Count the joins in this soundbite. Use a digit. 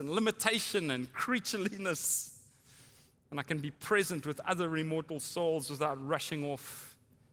0